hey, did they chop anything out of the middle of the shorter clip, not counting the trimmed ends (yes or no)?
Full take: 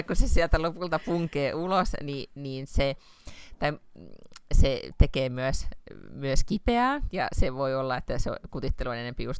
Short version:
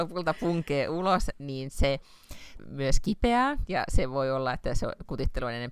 yes